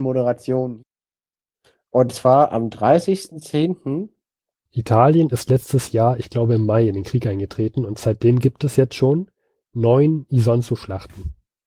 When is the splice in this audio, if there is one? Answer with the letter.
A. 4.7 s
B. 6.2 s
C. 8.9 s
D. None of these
A